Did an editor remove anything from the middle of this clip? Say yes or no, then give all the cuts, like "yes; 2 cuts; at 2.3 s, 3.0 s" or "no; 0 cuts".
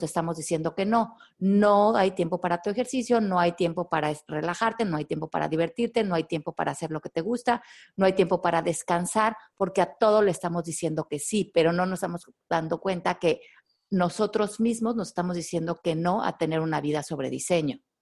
no; 0 cuts